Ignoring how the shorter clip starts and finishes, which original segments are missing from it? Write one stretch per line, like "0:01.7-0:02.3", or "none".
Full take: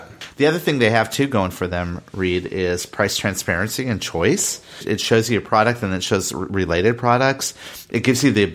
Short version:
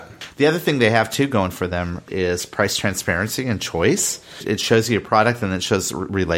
0:02.1-0:02.5